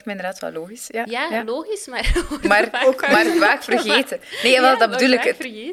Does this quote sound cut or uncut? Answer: uncut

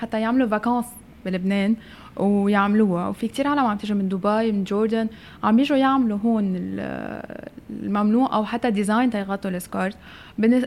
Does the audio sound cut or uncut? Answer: uncut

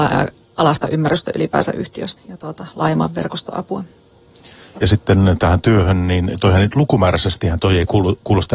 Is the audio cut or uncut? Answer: cut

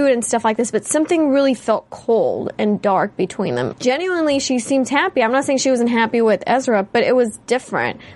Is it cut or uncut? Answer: cut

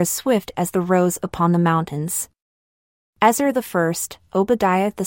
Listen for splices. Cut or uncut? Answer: uncut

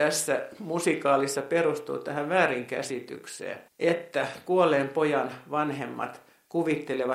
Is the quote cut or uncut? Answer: cut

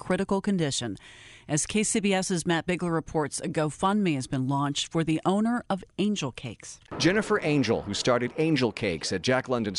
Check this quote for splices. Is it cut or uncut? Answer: uncut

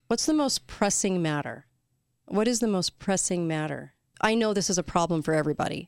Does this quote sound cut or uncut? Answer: cut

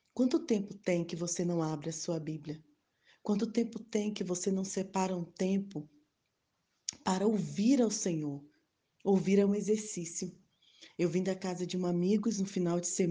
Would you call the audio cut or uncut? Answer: cut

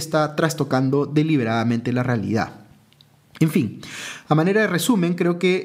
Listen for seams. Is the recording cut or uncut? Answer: uncut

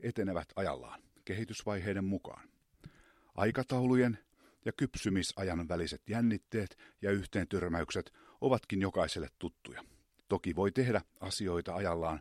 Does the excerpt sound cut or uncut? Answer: cut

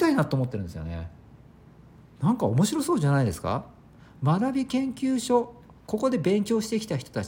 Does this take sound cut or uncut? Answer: uncut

